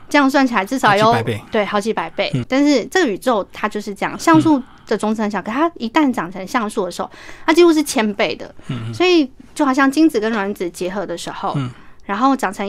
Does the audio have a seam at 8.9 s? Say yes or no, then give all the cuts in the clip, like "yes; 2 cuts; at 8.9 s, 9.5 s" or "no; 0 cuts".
no; 1 cut; at 2.4 s